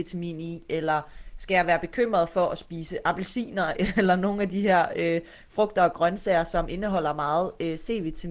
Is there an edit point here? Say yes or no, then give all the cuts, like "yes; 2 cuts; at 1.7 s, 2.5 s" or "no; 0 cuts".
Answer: no; 0 cuts